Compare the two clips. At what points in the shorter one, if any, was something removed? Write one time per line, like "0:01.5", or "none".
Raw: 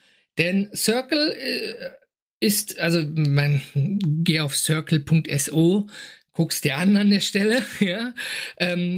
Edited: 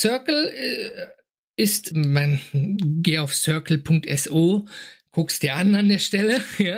0:01.9